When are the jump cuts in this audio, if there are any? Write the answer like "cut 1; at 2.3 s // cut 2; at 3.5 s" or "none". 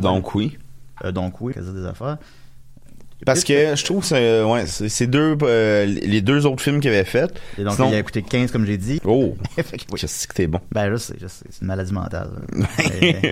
cut 1; at 1.5 s // cut 2; at 9.0 s